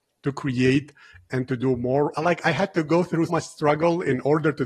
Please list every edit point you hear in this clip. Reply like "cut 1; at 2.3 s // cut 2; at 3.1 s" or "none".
cut 1; at 2.1 s // cut 2; at 3.3 s